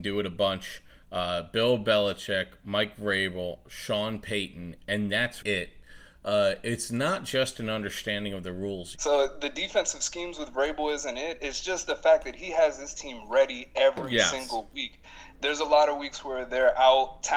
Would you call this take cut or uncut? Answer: cut